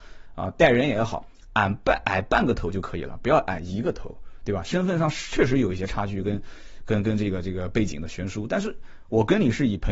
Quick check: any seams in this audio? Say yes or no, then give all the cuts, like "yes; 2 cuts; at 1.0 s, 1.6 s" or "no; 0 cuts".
no; 0 cuts